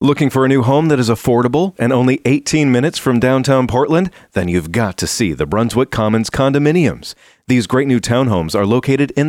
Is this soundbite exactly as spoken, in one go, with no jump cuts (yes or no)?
no